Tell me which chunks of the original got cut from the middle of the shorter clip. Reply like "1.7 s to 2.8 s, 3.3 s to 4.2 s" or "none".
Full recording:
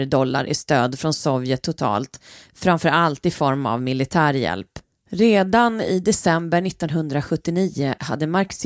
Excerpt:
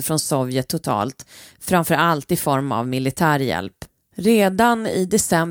none